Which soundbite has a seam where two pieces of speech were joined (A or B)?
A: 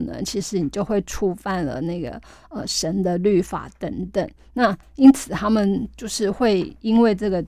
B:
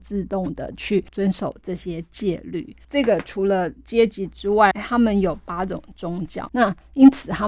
B